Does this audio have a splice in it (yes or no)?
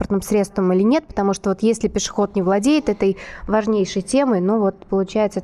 no